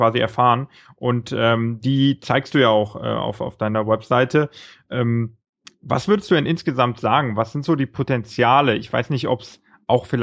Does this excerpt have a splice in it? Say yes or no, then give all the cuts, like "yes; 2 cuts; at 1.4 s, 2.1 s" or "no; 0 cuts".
no; 0 cuts